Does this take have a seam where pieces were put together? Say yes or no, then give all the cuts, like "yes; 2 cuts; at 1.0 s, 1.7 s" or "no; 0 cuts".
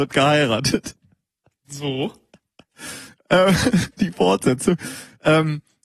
no; 0 cuts